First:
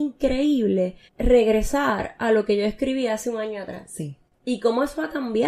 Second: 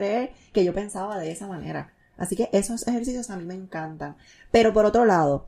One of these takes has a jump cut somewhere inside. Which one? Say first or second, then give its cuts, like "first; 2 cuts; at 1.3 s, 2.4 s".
first; 1 cut; at 1.1 s